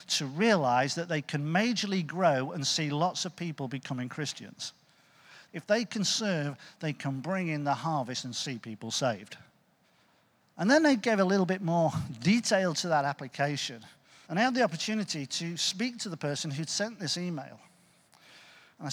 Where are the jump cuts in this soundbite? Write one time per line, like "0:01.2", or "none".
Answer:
0:05.5
0:10.4
0:14.2

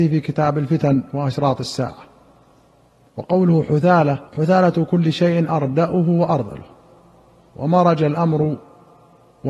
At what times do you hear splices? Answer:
0:04.3

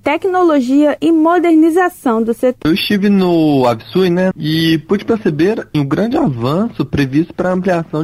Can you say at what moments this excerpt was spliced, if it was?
0:04.3
0:05.7

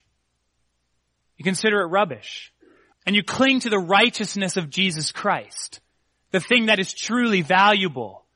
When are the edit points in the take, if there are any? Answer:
0:02.9

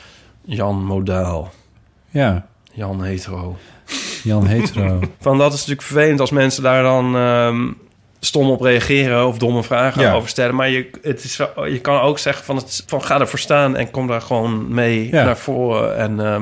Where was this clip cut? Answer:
0:05.1
0:12.8

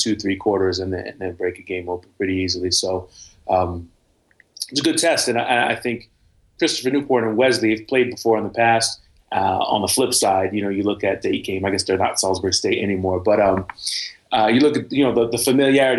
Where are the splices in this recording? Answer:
0:09.2
0:11.2

